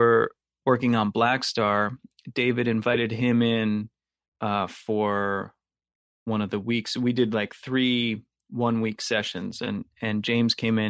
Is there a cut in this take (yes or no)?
no